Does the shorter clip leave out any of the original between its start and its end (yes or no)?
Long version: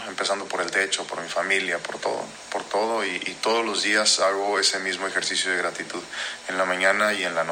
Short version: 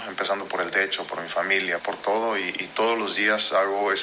yes